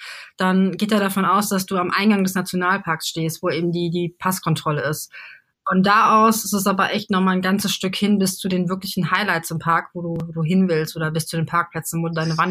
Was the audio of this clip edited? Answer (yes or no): no